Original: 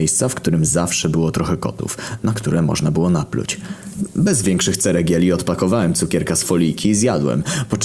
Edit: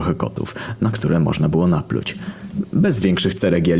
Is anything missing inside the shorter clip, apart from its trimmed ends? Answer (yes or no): no